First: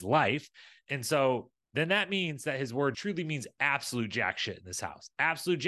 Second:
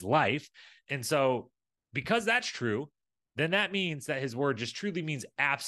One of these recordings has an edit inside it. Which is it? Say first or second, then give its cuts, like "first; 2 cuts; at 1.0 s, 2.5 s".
first; 2 cuts; at 1.6 s, 2.9 s